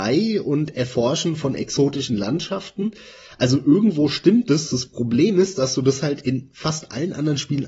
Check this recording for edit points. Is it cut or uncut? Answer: uncut